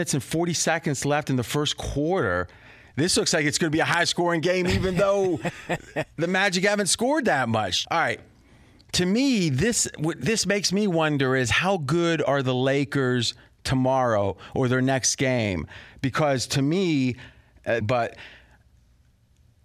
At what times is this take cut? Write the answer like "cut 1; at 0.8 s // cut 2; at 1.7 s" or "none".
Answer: cut 1; at 7.8 s // cut 2; at 17.8 s